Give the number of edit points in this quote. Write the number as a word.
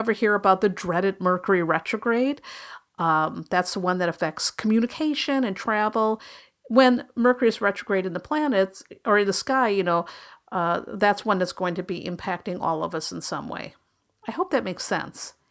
zero